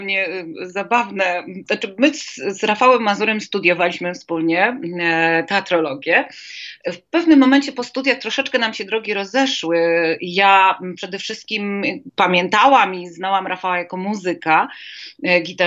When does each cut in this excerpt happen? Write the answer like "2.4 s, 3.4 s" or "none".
none

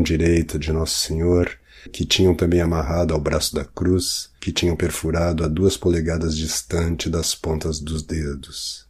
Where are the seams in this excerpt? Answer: 1.9 s, 4.4 s

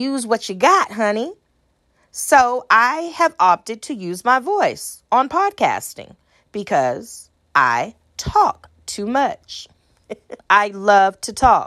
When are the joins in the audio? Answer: 10.4 s

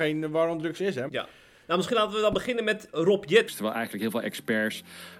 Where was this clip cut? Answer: 1.1 s, 3.5 s

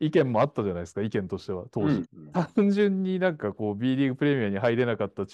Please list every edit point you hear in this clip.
2.0 s

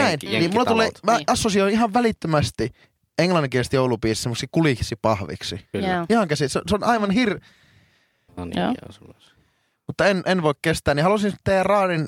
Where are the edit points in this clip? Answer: 5.7 s, 8.3 s

